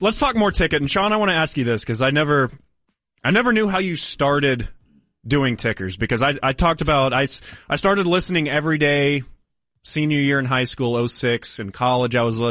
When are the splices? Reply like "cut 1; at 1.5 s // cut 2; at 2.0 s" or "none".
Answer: none